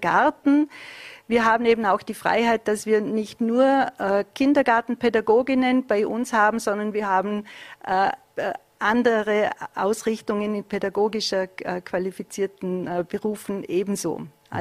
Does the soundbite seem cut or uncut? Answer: uncut